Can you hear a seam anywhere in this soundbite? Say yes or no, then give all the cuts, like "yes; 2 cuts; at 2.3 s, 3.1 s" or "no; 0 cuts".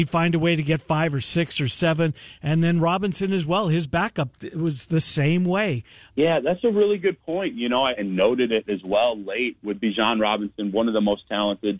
yes; 3 cuts; at 6.1 s, 7.9 s, 9.6 s